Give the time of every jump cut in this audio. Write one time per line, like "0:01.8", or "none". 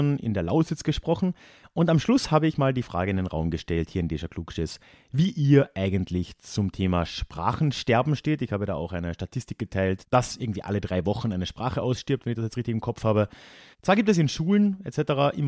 0:13.7

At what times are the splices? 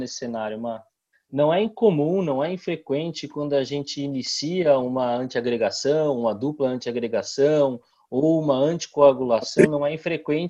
0:01.1

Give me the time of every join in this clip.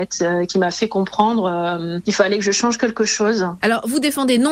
0:03.6

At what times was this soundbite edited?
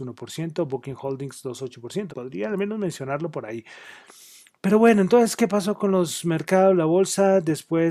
0:02.1

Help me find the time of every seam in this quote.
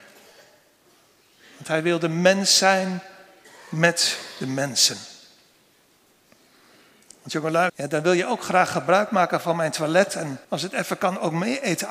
0:07.7
0:10.4

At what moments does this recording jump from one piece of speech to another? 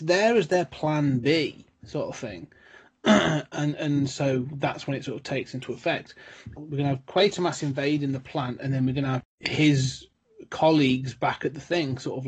0:06.6
0:09.2

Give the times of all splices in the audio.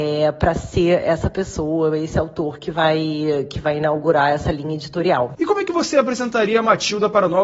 none

